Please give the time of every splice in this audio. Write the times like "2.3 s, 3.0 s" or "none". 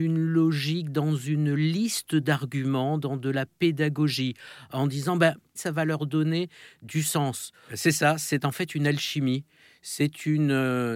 5.6 s, 7.7 s